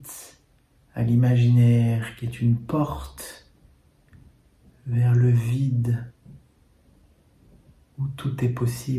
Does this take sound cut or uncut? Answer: uncut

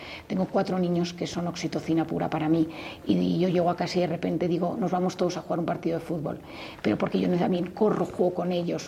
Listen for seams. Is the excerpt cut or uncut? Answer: uncut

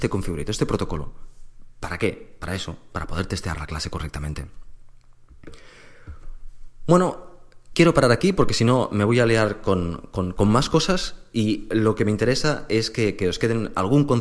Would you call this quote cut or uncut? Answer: uncut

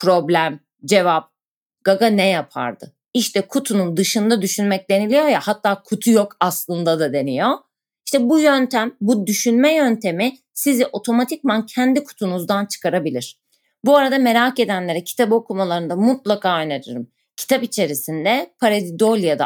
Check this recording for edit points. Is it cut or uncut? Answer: cut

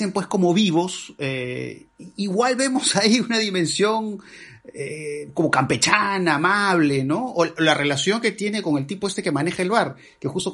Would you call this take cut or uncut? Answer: uncut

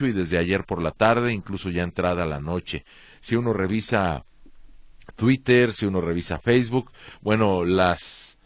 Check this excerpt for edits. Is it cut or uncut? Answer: uncut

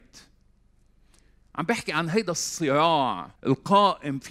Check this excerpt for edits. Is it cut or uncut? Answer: cut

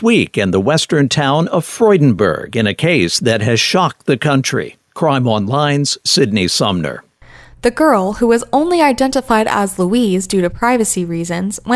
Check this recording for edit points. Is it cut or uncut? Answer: uncut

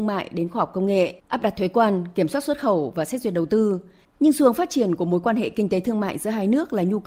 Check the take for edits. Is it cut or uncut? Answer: cut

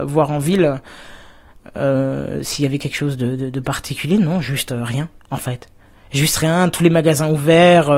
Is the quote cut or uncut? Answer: uncut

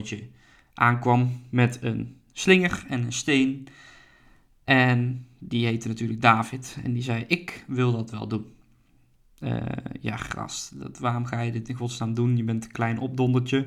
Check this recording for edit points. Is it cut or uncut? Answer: uncut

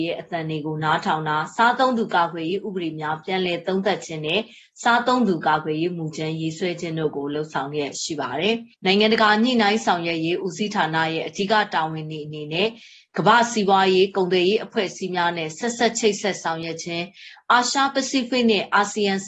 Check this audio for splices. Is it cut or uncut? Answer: cut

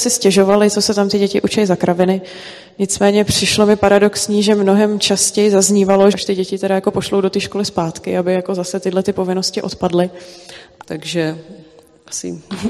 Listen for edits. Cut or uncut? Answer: cut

